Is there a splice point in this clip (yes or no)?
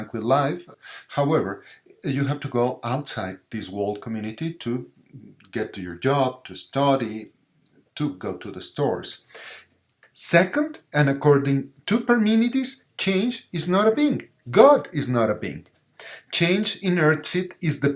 yes